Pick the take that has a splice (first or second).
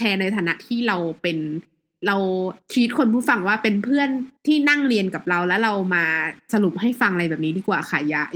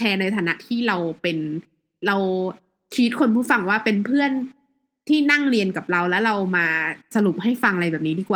first